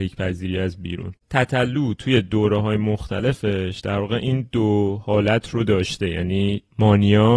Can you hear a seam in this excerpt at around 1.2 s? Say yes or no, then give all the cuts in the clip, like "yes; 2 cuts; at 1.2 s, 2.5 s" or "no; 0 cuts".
yes; 1 cut; at 1.2 s